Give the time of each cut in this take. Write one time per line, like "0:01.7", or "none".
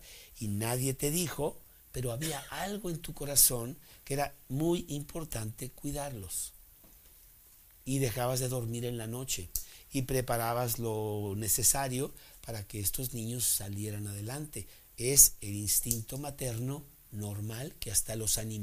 none